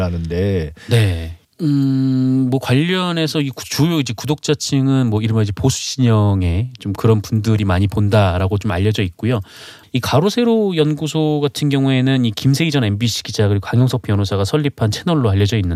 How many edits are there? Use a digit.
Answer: 1